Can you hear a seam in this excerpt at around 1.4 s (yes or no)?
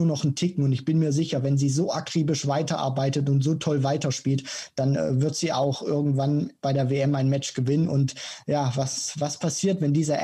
no